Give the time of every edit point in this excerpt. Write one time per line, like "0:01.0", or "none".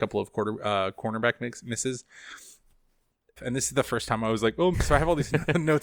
0:03.4
0:04.7